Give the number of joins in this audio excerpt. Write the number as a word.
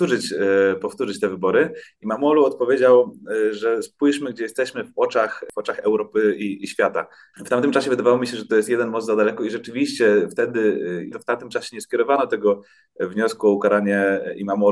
two